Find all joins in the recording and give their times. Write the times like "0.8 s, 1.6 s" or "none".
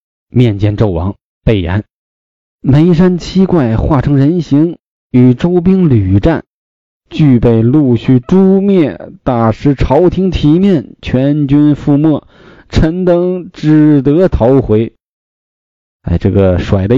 none